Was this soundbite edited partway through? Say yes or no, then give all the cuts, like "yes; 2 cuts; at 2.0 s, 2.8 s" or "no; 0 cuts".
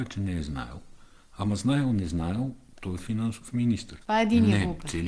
yes; 1 cut; at 4.0 s